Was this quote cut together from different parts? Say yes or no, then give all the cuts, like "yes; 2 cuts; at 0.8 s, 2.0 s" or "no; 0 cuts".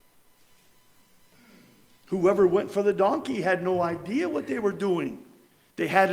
no; 0 cuts